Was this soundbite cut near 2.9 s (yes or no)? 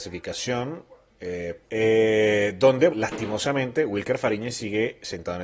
yes